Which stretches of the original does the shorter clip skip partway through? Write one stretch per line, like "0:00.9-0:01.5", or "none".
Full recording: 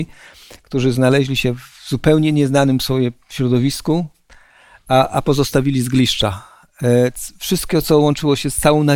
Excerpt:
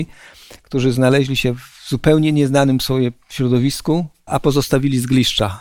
0:04.3-0:05.1